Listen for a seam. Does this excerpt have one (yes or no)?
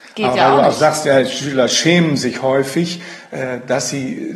no